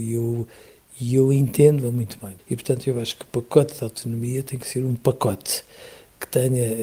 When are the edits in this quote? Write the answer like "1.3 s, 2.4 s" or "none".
2.4 s